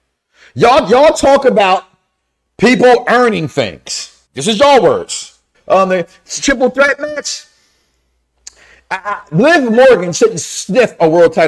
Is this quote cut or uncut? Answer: cut